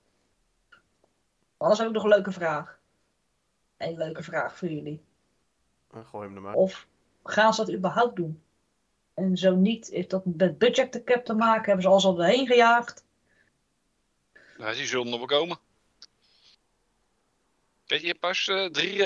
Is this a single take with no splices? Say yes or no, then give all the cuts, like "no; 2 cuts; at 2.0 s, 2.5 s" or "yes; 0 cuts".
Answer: no; 1 cut; at 6.5 s